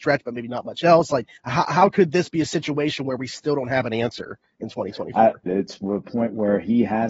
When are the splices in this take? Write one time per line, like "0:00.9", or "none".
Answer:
0:01.4
0:05.5